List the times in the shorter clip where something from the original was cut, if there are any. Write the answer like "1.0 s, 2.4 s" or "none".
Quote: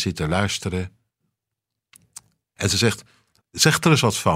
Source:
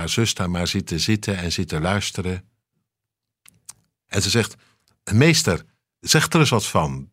3.4 s

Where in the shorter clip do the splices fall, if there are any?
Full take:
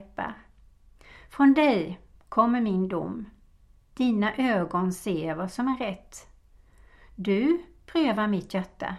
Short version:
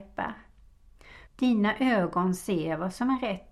1.3 s

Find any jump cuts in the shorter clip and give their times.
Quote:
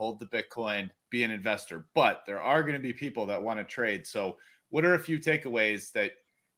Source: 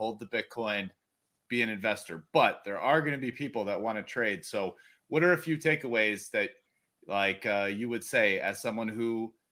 1.0 s

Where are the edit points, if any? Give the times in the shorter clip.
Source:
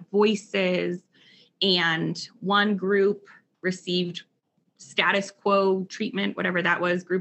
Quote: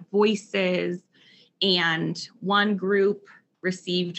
none

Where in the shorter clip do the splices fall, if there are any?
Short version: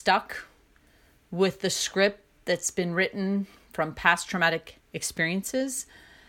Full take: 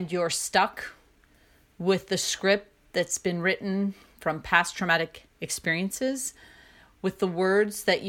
none

